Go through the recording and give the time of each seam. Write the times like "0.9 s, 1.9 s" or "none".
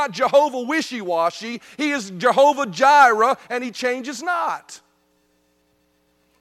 3.4 s